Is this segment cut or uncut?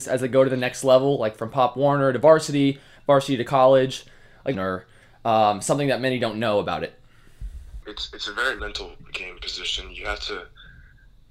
cut